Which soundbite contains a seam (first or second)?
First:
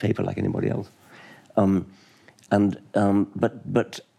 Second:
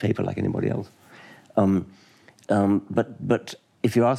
second